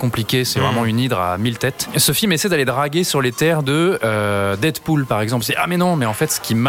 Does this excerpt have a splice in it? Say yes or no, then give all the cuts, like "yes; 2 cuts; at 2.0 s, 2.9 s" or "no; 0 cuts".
no; 0 cuts